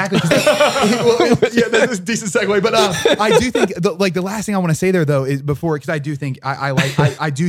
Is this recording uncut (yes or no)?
yes